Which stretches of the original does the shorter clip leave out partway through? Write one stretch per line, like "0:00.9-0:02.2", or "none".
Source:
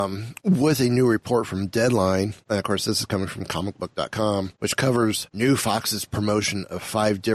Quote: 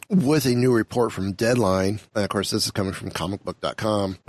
none